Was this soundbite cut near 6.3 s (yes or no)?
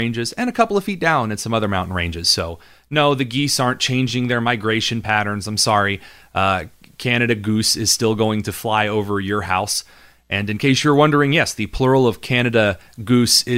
no